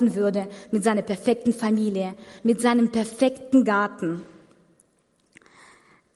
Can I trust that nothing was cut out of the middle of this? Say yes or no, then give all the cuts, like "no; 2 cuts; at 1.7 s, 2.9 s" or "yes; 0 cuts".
no; 1 cut; at 2.4 s